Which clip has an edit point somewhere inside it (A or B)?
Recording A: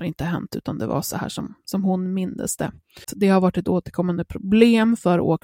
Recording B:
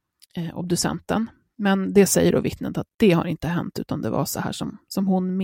A